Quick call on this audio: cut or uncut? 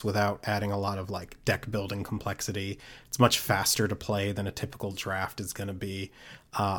uncut